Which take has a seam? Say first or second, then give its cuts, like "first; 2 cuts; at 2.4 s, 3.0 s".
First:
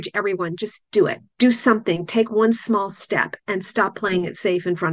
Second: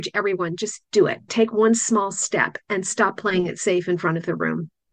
second; 1 cut; at 1.3 s